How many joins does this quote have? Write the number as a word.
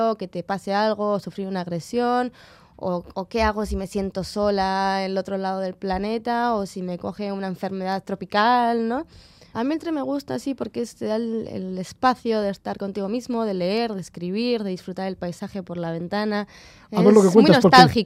one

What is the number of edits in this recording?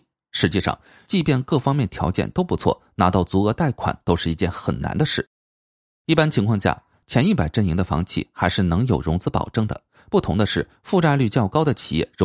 one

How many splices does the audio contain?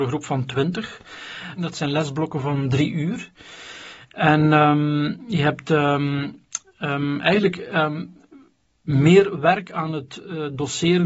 one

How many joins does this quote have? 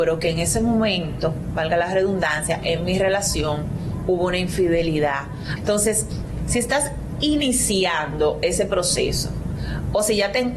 one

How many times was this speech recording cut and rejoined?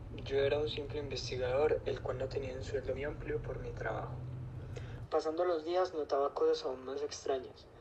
two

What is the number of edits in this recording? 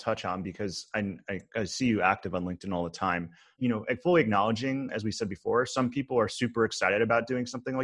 one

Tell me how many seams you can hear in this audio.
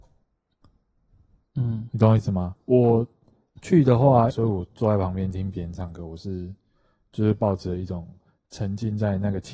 one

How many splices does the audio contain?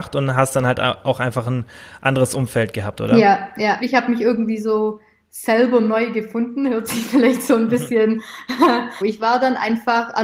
two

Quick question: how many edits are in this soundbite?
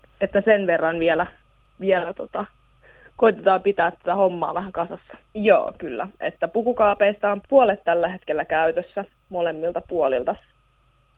two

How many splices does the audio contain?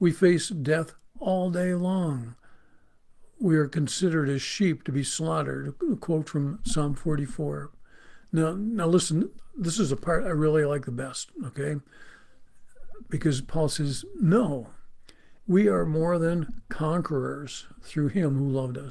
one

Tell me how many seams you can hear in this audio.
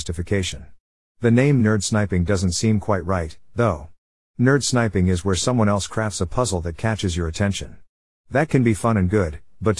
zero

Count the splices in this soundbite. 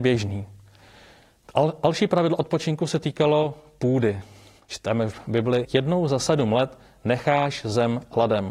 one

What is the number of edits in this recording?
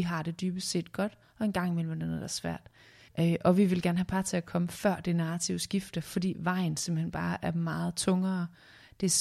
one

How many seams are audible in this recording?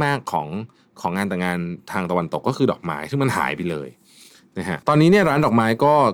one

